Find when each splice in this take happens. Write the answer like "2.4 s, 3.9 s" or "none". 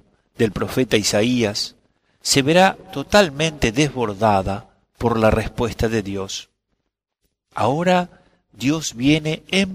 2.1 s